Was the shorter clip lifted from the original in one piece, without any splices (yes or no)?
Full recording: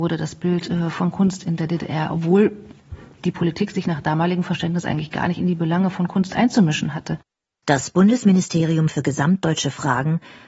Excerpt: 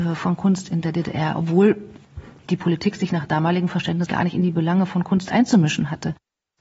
no